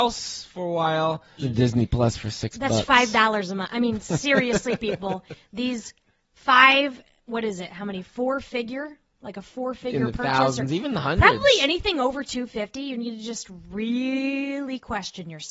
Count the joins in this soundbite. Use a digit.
1